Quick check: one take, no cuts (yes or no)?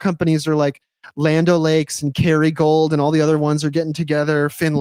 yes